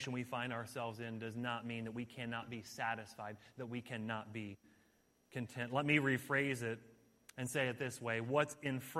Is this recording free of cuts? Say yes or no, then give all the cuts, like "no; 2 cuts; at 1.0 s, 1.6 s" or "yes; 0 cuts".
yes; 0 cuts